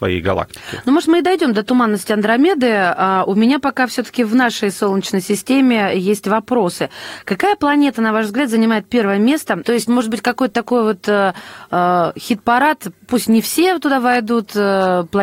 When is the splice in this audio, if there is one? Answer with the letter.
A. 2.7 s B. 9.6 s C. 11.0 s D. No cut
B